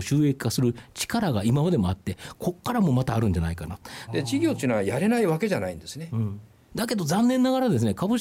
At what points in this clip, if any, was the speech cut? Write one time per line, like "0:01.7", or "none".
0:04.1
0:06.7